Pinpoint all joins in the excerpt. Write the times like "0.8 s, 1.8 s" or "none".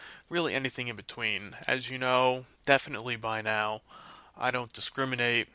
2.5 s

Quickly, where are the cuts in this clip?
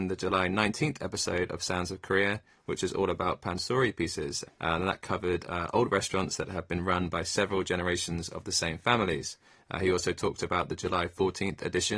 4.5 s

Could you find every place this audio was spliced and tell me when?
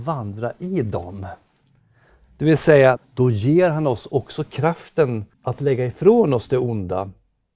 3.0 s, 5.3 s

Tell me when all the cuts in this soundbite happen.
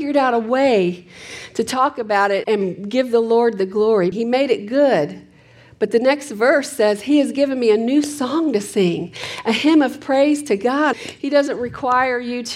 2.4 s, 4.1 s, 10.9 s

